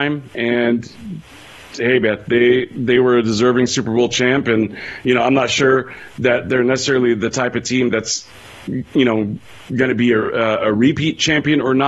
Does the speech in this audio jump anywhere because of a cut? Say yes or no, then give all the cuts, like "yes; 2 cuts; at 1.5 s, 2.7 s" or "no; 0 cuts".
no; 0 cuts